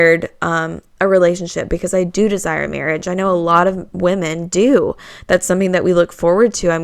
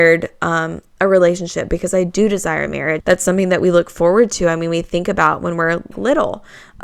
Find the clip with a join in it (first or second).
second